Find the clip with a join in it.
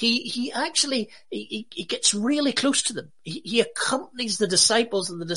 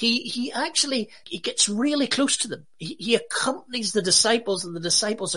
second; 1 cut; at 1.2 s

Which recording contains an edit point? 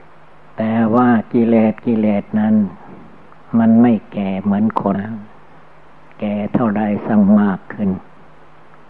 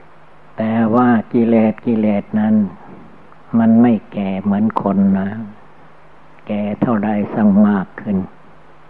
first; 1 cut; at 4.9 s

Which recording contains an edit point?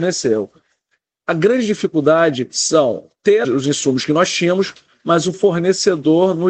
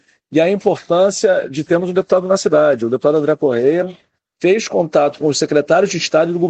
first; 1 cut; at 3.4 s

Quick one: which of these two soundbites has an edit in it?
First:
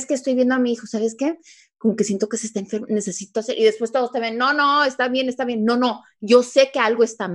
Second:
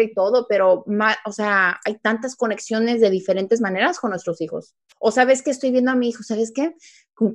second; 1 cut; at 4.9 s

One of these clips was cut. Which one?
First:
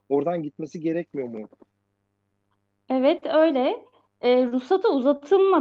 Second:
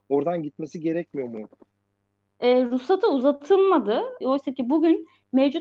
second; 2 cuts; at 2.3 s, 4.2 s

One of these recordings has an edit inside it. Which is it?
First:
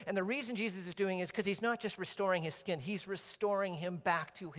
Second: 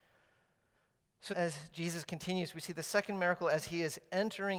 second; 1 cut; at 1.3 s

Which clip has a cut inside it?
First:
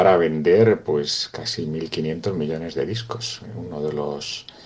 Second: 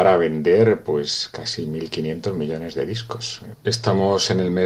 second; 1 cut; at 3.5 s

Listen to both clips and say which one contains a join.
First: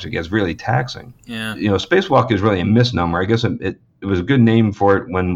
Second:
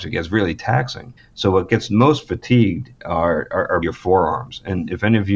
second; 2 cuts; at 1.2 s, 3.8 s

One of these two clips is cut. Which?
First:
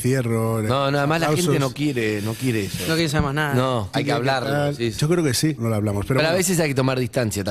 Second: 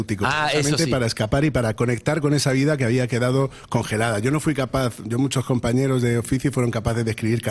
first; 2 cuts; at 3.9 s, 5.6 s

